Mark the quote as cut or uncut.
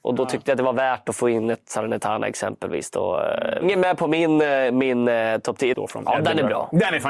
cut